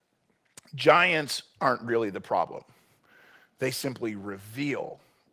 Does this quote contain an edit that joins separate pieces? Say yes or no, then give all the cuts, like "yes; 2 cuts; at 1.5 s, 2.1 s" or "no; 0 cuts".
no; 0 cuts